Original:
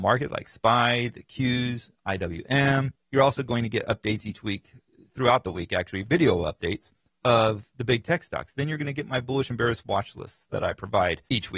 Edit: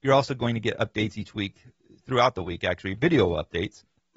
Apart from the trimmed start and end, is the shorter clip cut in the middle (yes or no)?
no